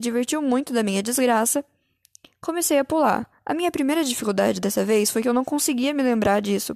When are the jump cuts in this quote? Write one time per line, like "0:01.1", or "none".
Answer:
none